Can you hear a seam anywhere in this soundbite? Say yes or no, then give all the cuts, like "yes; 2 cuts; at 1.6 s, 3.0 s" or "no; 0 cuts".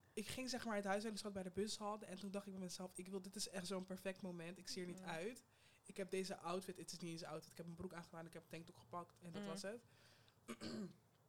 no; 0 cuts